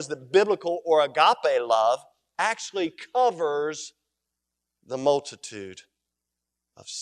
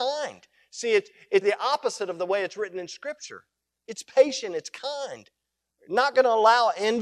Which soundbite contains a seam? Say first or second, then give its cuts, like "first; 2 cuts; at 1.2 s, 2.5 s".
second; 1 cut; at 1.4 s